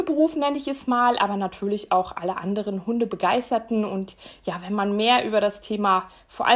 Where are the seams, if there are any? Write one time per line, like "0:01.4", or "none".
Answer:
none